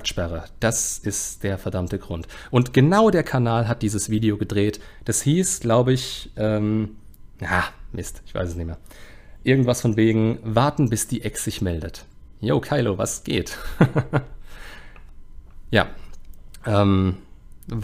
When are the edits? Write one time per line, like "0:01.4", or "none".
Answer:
0:06.3